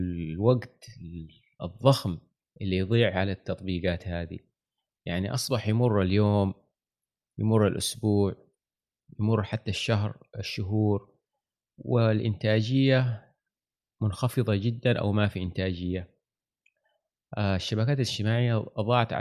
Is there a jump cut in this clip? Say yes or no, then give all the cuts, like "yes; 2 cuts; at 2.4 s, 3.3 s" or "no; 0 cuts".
yes; 1 cut; at 10.3 s